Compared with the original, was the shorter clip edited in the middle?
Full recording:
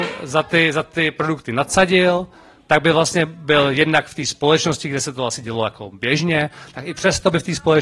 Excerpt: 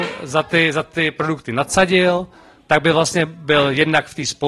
no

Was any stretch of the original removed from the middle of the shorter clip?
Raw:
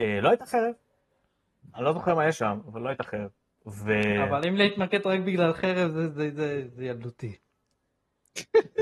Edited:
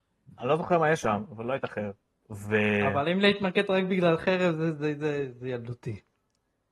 no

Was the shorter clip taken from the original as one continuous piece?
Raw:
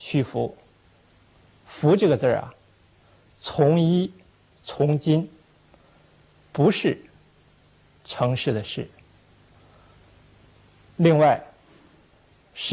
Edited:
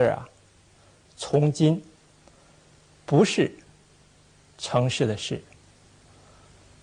no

